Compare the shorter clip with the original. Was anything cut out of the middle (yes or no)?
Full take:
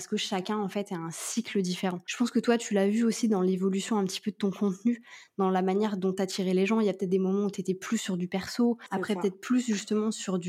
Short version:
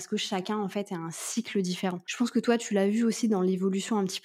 no